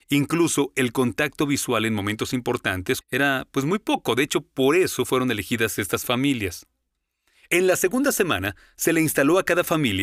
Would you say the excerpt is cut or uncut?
cut